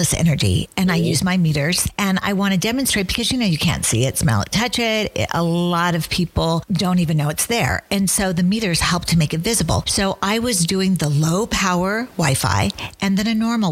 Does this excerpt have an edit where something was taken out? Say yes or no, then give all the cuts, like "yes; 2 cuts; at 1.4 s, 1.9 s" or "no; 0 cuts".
no; 0 cuts